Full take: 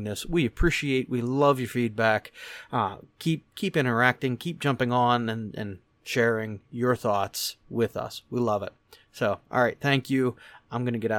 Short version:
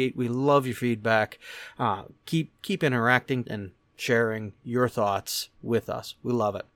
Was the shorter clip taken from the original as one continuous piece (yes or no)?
no